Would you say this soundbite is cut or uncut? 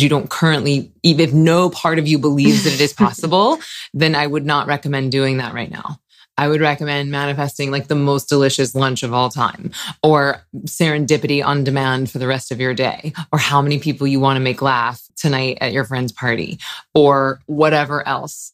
cut